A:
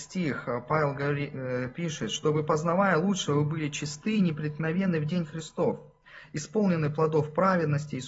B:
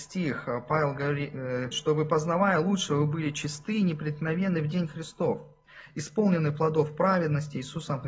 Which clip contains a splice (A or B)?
B